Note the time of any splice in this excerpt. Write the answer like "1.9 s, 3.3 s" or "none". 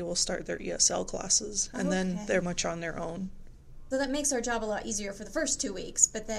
2.4 s, 3.9 s